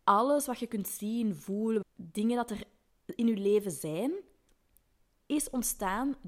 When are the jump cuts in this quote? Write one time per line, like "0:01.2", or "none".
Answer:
0:01.8